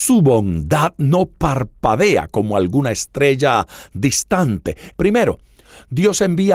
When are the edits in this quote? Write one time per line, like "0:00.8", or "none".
0:04.9